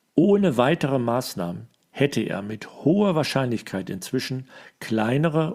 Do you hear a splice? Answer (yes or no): no